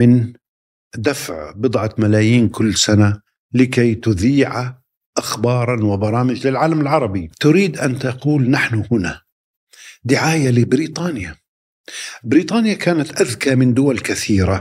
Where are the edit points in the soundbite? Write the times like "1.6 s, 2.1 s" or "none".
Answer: 7.3 s

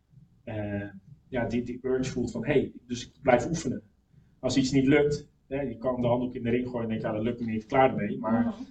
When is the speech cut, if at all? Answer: 2.8 s

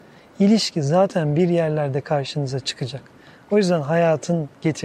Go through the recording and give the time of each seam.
none

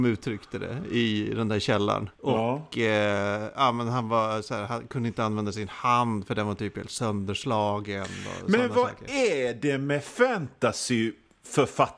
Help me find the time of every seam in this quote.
2.1 s

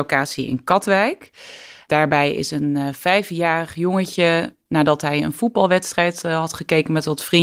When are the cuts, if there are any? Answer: none

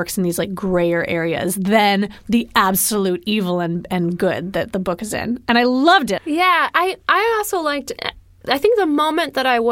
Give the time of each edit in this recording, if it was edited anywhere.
6.2 s

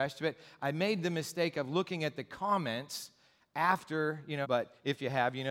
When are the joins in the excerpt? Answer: 4.4 s

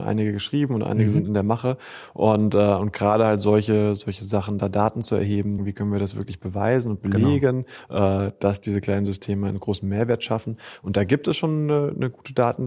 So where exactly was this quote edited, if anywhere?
5.6 s

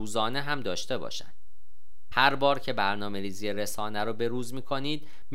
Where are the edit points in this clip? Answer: 2.1 s

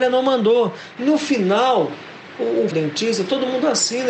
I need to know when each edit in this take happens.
1.0 s, 2.7 s

